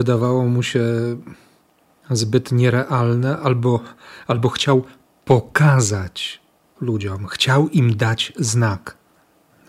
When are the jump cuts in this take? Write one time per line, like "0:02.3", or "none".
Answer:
none